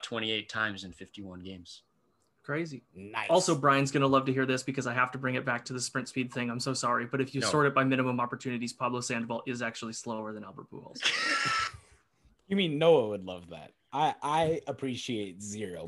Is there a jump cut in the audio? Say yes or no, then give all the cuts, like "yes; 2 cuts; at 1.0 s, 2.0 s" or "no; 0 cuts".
no; 0 cuts